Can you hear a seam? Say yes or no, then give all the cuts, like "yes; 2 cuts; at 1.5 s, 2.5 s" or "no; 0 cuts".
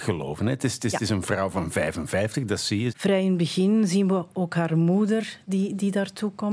yes; 1 cut; at 2.9 s